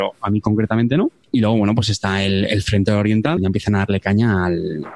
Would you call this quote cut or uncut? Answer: cut